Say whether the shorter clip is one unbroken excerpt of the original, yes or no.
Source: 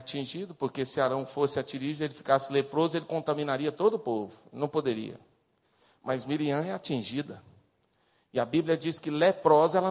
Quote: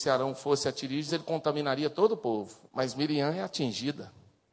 no